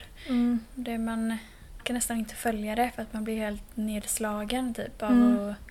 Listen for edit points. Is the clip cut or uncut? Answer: cut